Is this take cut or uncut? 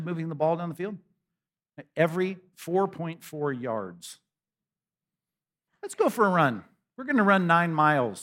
cut